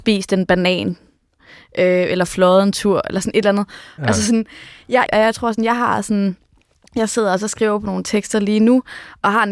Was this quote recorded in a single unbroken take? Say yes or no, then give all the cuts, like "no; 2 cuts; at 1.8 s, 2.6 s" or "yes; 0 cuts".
no; 2 cuts; at 4.0 s, 5.1 s